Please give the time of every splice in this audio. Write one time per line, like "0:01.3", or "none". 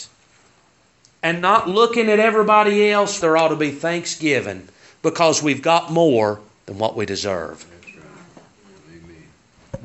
0:03.2